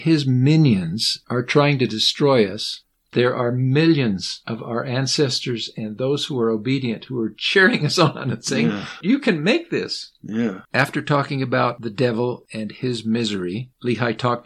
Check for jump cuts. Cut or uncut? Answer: cut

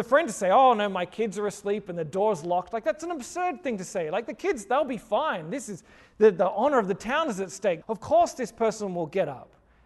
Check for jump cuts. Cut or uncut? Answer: cut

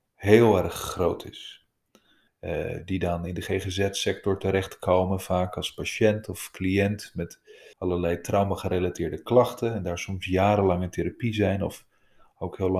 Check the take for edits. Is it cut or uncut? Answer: cut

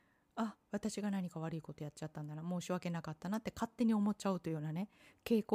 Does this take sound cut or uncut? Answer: uncut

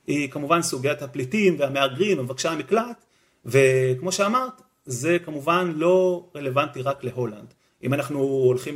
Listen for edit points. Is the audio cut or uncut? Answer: cut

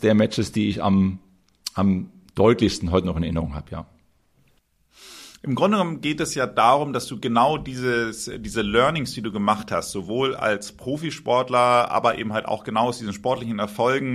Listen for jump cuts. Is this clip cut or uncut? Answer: uncut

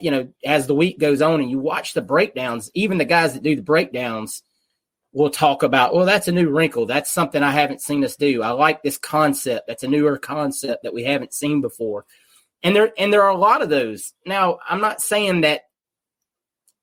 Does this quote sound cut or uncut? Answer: uncut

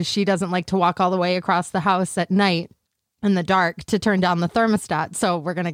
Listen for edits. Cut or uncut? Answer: uncut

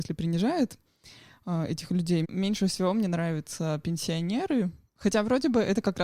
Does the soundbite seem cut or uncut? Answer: cut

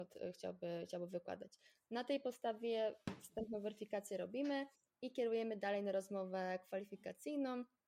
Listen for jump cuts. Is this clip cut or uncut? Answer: uncut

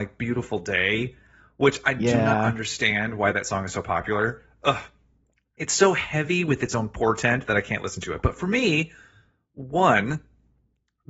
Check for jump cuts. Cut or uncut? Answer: uncut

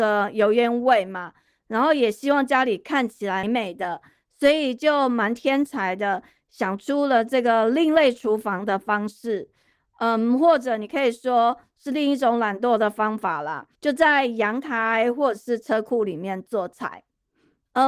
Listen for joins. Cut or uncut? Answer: cut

